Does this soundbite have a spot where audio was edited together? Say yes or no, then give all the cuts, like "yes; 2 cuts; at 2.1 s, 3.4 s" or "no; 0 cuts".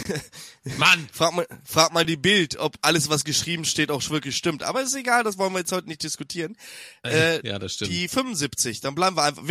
no; 0 cuts